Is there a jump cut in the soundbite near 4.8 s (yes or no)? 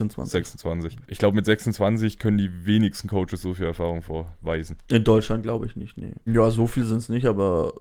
no